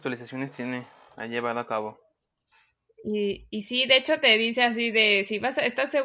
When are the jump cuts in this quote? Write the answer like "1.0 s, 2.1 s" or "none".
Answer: none